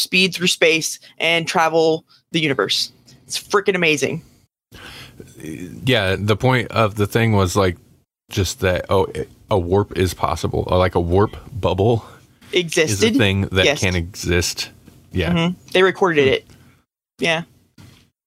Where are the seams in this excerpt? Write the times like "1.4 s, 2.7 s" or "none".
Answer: none